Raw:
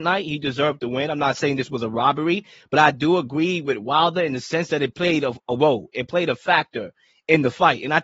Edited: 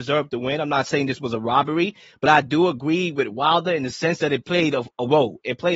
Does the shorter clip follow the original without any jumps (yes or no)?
yes